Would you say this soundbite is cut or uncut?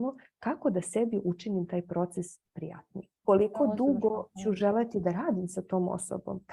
cut